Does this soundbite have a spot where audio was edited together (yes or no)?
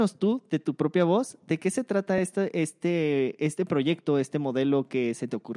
no